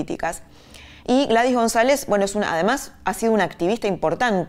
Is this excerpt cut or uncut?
uncut